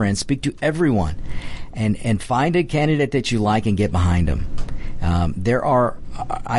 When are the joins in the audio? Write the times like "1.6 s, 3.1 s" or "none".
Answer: 2.0 s